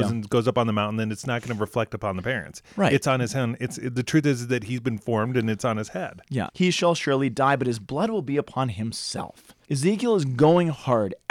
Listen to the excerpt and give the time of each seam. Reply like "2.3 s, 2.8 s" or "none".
6.5 s, 9.6 s